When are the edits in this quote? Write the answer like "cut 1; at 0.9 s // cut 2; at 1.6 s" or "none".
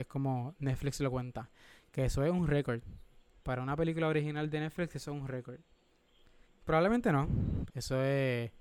cut 1; at 6.4 s // cut 2; at 7.7 s

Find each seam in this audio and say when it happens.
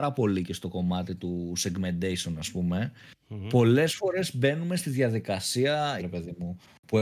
cut 1; at 6.0 s

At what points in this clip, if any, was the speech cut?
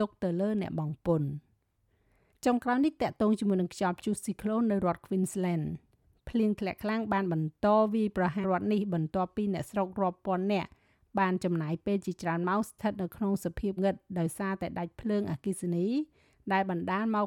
cut 1; at 8.4 s // cut 2; at 13.8 s

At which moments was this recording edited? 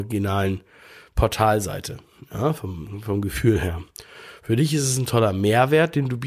none

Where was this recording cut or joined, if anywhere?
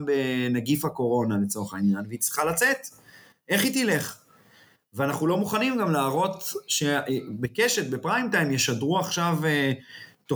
none

